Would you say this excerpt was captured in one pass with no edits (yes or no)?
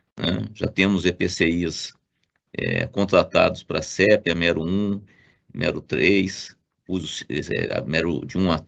yes